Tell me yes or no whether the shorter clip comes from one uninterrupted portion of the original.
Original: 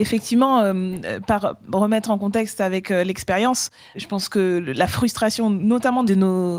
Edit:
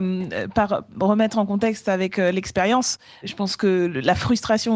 yes